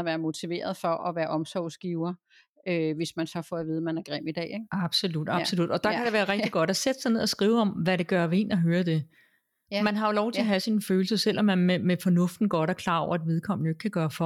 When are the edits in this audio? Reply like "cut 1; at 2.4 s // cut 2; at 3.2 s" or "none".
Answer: none